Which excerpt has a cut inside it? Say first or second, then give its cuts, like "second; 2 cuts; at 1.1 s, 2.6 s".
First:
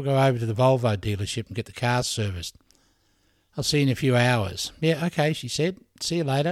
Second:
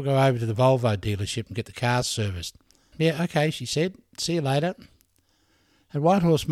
second; 1 cut; at 2.9 s